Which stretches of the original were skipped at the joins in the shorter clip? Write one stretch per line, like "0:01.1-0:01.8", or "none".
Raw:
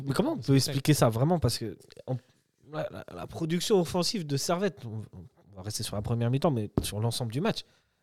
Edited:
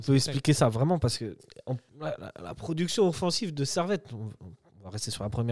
0:02.3-0:02.6